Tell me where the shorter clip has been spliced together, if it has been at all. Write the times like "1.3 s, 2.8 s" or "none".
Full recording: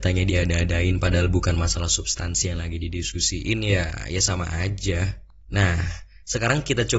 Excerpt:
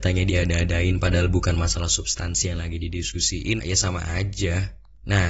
3.6 s